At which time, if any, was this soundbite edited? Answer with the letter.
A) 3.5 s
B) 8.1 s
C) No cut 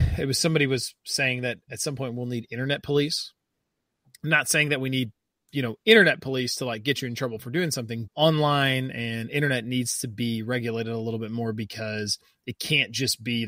B